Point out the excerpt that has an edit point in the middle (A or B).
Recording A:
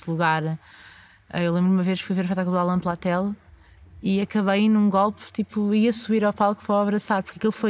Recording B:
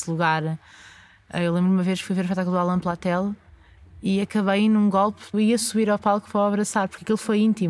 B